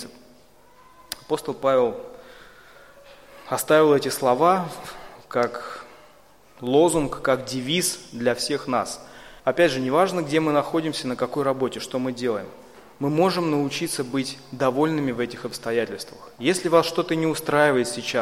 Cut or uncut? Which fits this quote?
cut